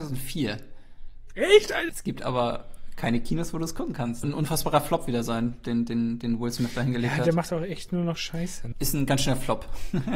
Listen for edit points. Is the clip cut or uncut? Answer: cut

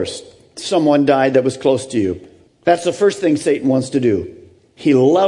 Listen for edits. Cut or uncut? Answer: cut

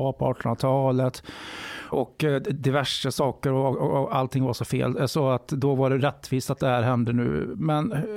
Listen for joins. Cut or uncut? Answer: cut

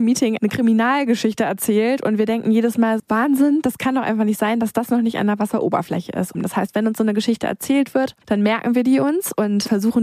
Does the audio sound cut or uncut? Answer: cut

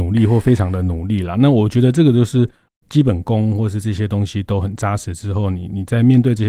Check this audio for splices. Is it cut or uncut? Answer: uncut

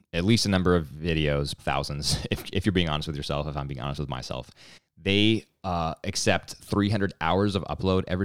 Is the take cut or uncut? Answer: cut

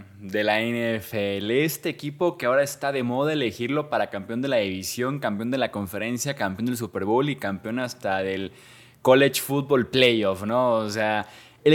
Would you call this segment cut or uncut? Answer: uncut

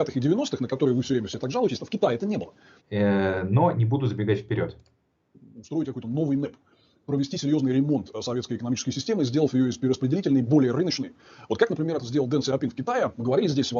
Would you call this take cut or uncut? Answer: cut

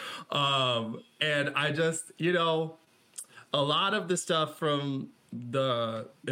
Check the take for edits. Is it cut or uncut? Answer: uncut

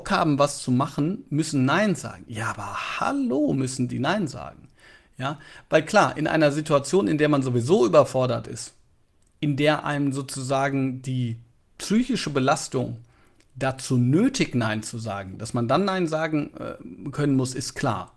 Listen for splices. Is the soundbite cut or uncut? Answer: uncut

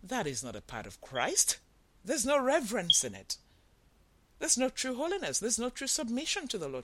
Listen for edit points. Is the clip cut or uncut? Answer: uncut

